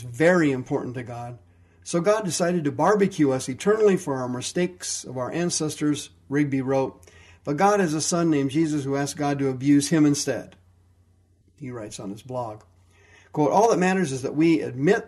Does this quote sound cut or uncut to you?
cut